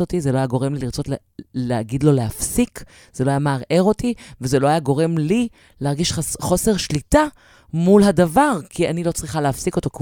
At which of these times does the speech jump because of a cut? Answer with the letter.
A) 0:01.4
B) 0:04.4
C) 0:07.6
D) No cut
D